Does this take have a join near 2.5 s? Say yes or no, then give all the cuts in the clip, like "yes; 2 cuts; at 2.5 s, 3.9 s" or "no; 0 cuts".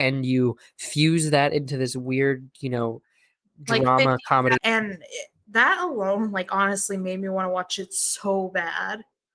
no; 1 cut; at 4.6 s